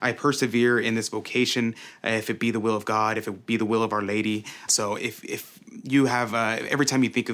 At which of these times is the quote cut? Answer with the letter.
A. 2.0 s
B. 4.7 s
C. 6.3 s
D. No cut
B